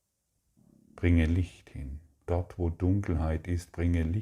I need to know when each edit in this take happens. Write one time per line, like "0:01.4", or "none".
0:02.3